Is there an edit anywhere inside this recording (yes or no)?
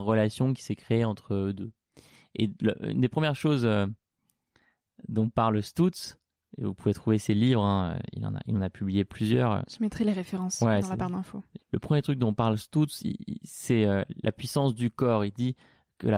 yes